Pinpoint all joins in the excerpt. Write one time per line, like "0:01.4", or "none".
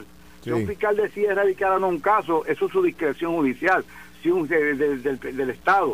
none

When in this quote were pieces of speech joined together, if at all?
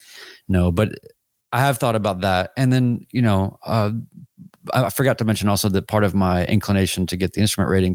none

